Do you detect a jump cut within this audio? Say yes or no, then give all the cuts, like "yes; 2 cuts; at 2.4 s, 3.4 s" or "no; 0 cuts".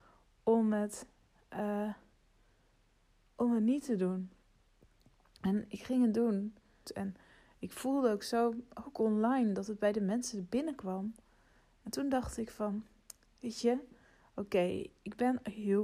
yes; 1 cut; at 6.8 s